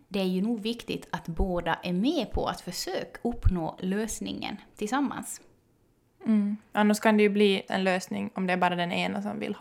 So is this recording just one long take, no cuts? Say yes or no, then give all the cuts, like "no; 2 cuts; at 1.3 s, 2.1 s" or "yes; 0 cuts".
no; 1 cut; at 7.7 s